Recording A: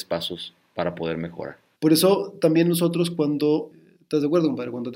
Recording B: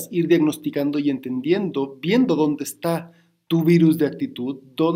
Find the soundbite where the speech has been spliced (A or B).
A